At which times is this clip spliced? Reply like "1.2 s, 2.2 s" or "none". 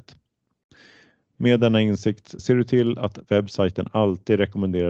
2.4 s